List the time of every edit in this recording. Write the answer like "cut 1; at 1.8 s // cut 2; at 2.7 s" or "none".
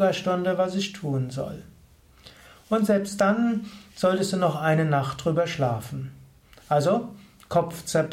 none